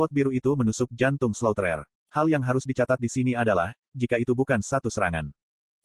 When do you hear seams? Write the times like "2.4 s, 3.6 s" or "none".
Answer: none

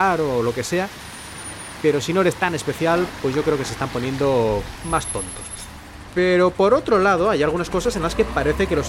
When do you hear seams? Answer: none

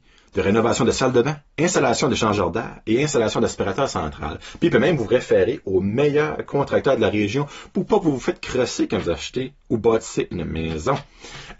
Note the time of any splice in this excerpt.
1.5 s

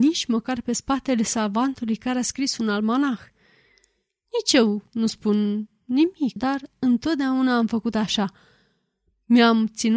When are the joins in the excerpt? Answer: 6.4 s

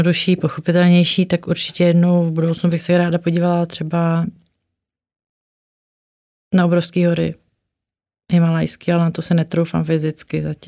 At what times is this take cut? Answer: none

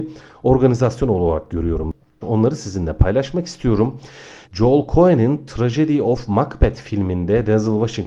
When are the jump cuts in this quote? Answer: 2.2 s, 4.4 s

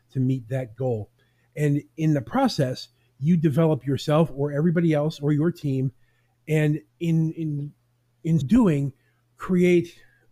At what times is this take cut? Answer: 6.9 s, 8.4 s

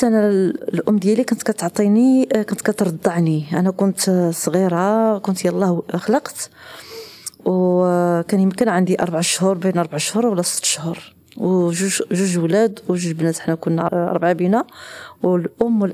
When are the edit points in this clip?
13.9 s

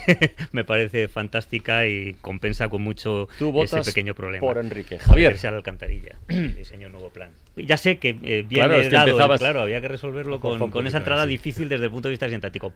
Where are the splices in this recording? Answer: 7.6 s, 9.4 s

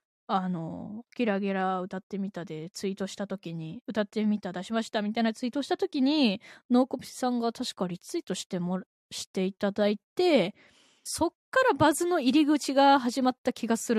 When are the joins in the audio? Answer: 11.1 s

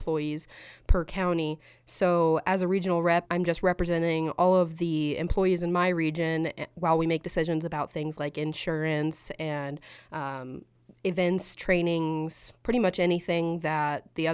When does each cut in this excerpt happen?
3.2 s

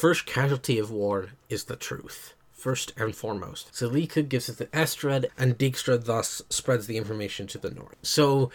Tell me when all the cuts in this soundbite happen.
3.7 s, 5.3 s

